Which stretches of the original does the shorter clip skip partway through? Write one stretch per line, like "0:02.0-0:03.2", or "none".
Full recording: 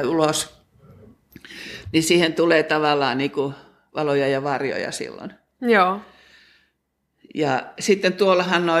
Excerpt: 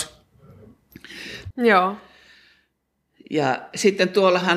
0:01.9-0:05.5